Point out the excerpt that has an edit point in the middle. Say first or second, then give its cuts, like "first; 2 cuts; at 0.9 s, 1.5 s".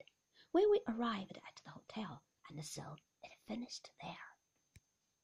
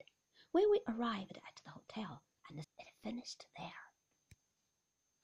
second; 1 cut; at 2.6 s